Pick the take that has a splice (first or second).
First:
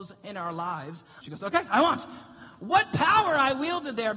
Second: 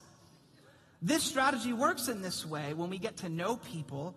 first